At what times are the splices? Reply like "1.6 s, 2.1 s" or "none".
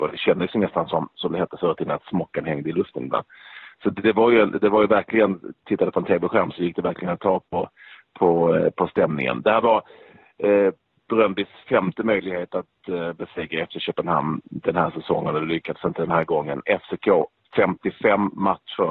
5.6 s